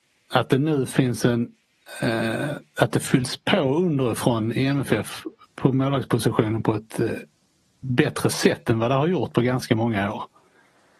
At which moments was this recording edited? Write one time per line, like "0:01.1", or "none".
none